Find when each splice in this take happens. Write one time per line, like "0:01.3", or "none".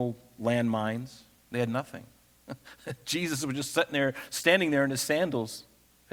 none